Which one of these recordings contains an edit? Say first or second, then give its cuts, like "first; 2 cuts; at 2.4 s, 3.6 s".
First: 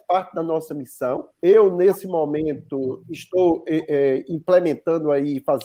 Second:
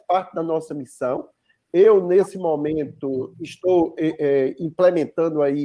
first; 1 cut; at 1.3 s